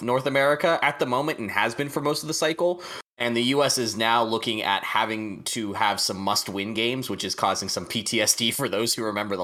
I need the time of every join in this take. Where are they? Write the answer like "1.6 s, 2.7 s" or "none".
3.1 s